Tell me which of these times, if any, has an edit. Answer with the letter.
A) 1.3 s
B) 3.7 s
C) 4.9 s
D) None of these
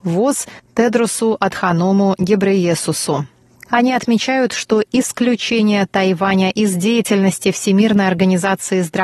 B